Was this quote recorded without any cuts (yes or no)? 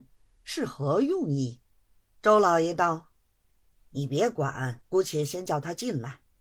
no